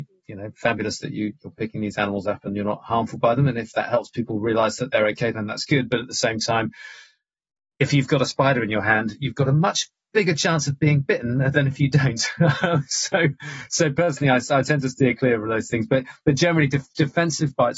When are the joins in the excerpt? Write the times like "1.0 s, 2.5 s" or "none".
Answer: none